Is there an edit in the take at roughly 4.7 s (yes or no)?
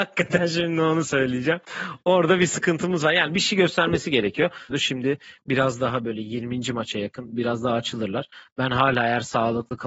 yes